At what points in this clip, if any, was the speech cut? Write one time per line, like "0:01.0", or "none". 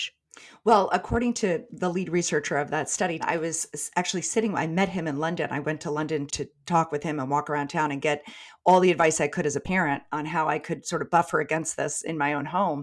0:03.2
0:06.3